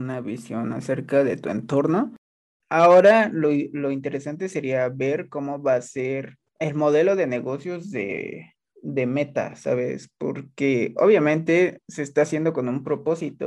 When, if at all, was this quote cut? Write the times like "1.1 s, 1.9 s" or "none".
2.6 s, 6.5 s